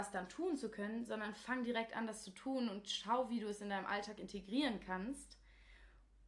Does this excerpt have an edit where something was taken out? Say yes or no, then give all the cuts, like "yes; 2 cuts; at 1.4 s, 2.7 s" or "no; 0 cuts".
no; 0 cuts